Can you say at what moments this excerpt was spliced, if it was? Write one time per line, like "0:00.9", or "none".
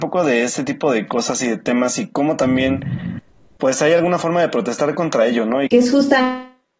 0:05.7